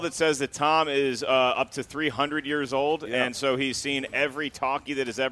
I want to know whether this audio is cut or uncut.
uncut